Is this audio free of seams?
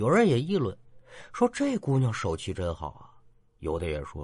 yes; 0 cuts

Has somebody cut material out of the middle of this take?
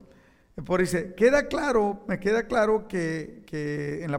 no; 0 cuts

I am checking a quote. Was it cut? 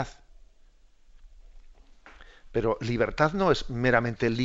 no; 0 cuts

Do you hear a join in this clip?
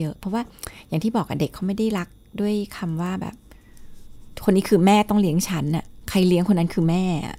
no; 0 cuts

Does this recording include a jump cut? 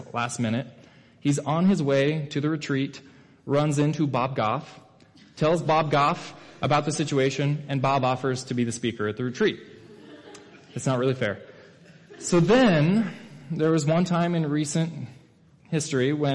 no; 0 cuts

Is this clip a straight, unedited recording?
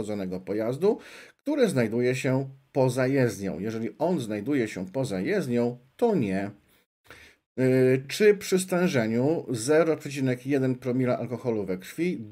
yes; 0 cuts

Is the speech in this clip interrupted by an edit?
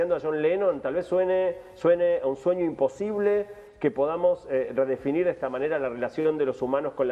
no; 0 cuts

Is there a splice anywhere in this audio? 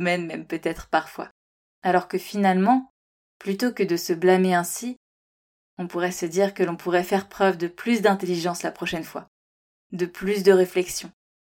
no; 0 cuts

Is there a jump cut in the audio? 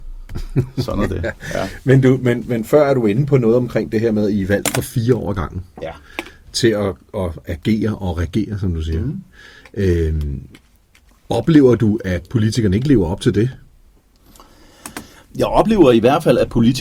no; 0 cuts

